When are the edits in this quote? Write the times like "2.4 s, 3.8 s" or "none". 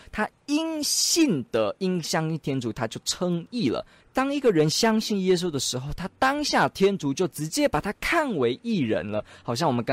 4.0 s